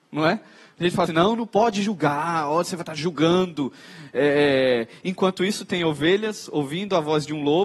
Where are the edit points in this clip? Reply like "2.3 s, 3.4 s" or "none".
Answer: 1.1 s